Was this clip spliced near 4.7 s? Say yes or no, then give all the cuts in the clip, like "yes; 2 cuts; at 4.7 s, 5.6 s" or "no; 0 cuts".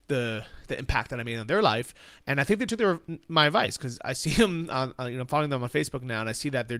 no; 1 cut; at 2.2 s